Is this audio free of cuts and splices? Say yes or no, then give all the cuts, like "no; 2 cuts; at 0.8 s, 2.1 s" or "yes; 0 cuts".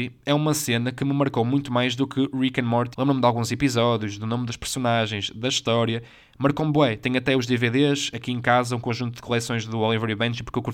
no; 1 cut; at 2.9 s